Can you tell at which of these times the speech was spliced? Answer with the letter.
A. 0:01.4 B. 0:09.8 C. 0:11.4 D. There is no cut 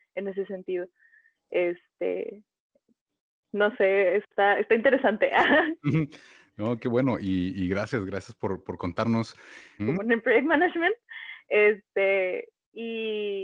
B